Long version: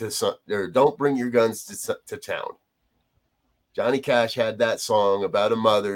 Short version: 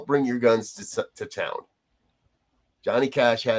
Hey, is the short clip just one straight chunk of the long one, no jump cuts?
yes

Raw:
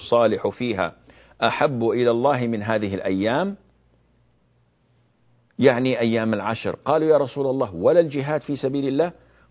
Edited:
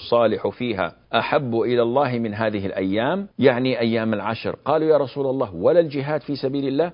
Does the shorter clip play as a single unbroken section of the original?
no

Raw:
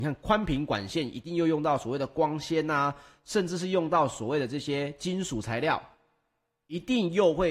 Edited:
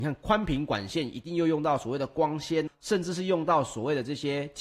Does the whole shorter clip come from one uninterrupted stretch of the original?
no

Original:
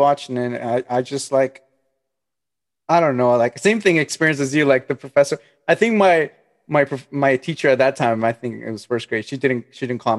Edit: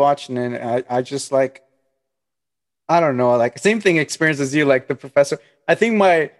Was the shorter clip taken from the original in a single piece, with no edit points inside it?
yes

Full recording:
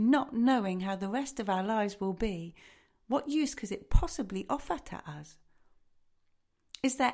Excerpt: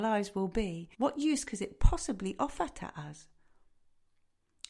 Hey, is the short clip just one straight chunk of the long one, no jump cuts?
no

